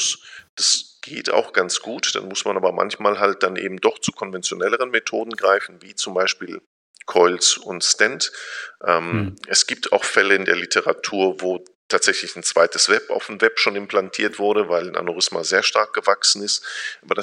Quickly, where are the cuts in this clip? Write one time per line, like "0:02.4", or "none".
none